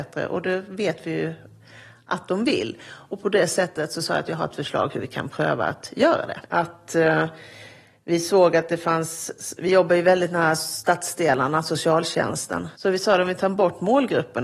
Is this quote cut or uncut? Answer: cut